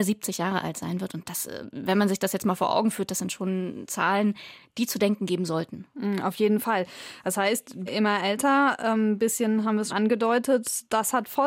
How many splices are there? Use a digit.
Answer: 2